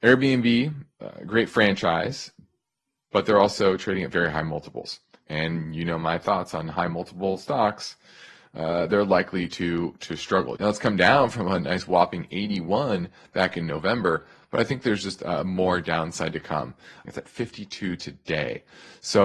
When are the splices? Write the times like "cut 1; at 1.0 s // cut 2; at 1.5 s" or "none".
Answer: cut 1; at 10.6 s // cut 2; at 17.1 s